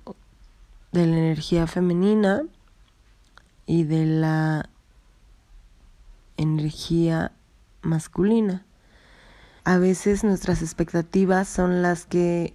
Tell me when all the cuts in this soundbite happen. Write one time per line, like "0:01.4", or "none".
0:09.6

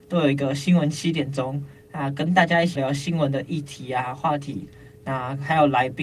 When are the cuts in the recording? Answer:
0:02.8

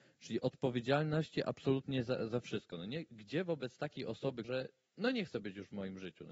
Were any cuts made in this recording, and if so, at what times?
0:04.4

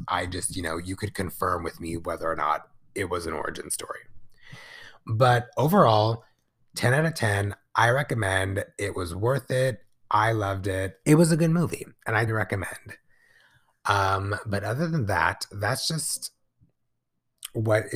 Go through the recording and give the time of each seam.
0:11.0
0:12.3

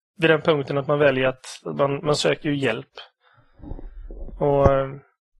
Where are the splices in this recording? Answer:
none

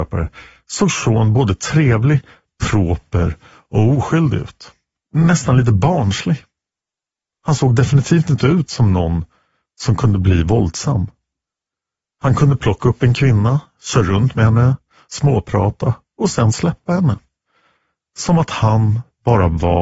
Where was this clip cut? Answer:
none

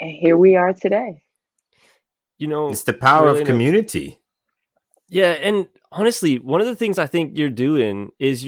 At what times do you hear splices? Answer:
none

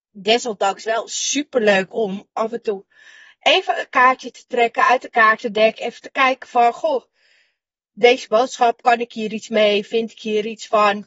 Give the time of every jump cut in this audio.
none

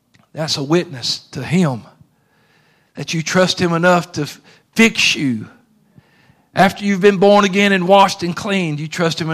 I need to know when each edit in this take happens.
none

